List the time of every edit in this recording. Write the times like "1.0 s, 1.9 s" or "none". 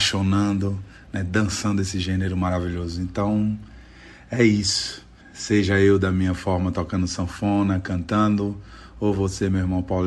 5.2 s